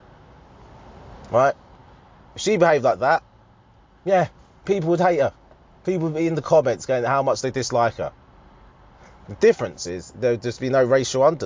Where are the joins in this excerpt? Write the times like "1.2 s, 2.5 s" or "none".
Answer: none